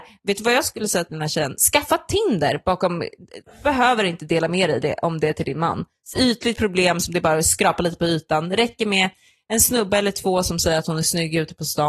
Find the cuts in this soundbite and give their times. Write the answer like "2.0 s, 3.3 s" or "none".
6.1 s